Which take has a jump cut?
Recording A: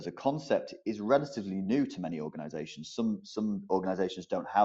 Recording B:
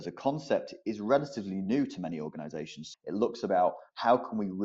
B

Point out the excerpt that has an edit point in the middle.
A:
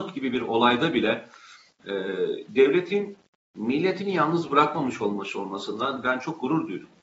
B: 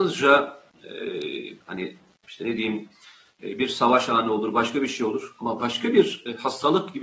B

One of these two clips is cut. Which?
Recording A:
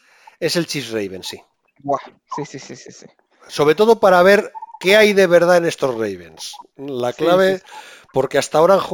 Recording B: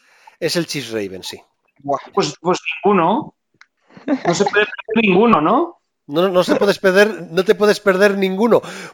B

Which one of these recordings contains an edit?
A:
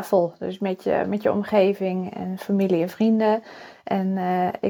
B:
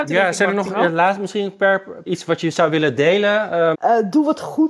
B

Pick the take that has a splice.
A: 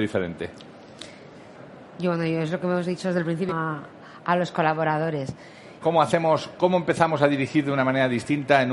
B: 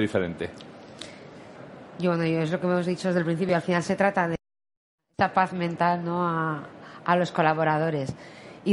A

